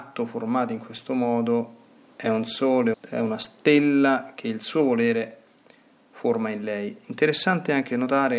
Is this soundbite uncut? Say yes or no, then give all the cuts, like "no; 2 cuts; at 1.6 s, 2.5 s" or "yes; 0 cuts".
no; 1 cut; at 2.9 s